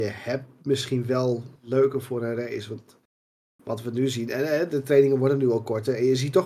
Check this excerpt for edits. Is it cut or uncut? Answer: uncut